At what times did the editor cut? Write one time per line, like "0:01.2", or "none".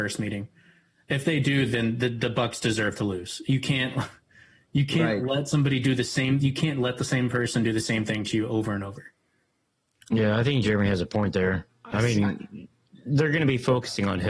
none